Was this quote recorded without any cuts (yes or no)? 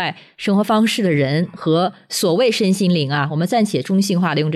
yes